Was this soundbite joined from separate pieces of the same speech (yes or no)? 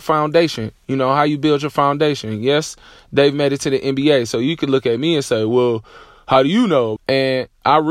yes